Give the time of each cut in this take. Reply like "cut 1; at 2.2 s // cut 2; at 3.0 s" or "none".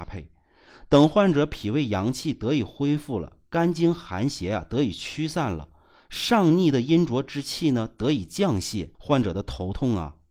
cut 1; at 8.9 s